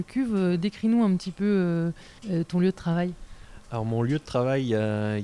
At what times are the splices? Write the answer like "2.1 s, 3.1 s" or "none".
2.2 s

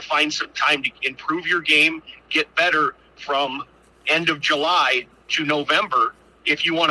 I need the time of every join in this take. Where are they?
none

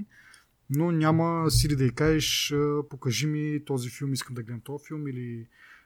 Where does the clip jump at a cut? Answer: none

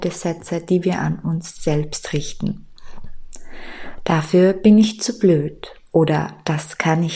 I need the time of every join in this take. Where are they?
none

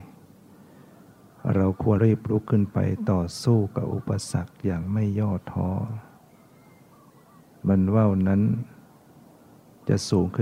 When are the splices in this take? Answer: 2.0 s

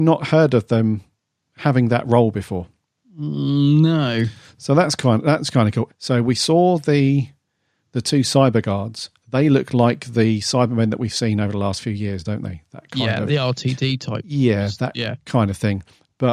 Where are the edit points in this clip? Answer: 5.9 s, 13.3 s

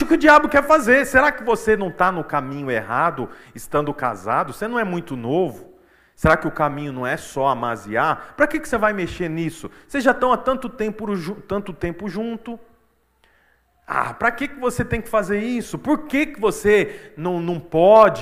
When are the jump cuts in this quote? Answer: none

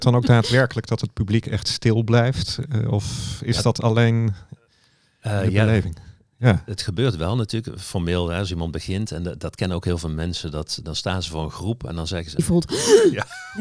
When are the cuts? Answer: 10.8 s, 12.4 s

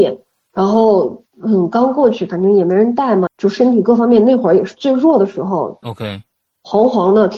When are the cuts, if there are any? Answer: 3.3 s, 5.8 s

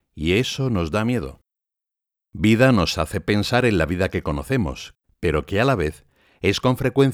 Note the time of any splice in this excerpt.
5.0 s

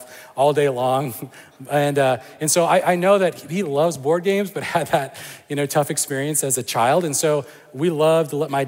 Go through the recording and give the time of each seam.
none

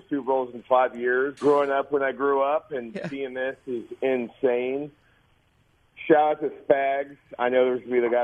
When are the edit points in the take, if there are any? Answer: 1.4 s

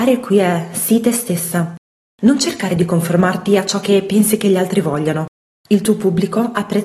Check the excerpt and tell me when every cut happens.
none

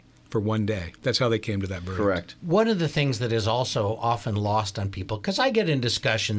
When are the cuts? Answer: 1.0 s

